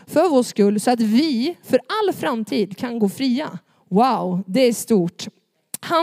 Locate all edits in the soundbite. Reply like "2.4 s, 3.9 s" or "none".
none